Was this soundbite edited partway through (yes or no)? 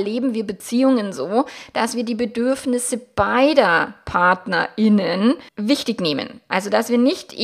yes